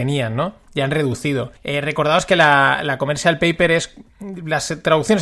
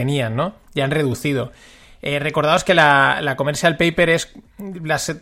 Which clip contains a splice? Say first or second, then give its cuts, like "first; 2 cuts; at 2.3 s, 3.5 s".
first; 1 cut; at 1.6 s